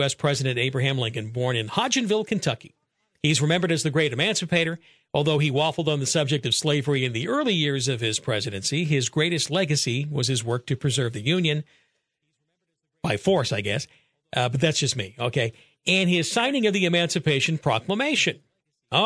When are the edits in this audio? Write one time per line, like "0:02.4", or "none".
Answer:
none